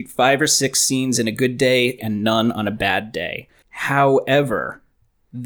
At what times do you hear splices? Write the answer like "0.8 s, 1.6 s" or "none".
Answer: 2.0 s, 3.6 s